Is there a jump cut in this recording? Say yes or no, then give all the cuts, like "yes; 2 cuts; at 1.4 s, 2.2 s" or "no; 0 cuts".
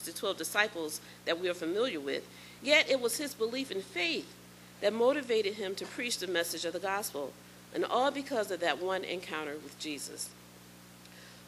yes; 1 cut; at 2.6 s